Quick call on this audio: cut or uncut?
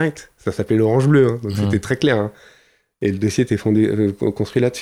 uncut